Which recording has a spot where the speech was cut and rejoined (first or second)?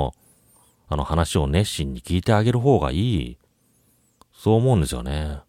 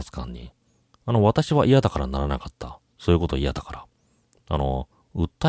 second